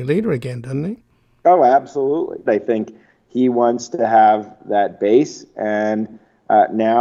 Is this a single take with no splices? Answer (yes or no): no